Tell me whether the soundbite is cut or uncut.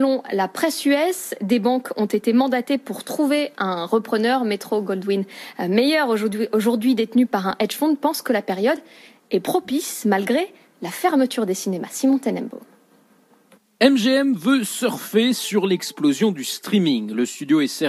uncut